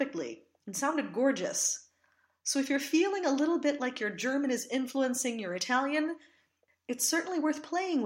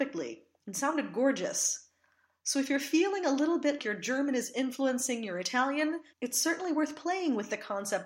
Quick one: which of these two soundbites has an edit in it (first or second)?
second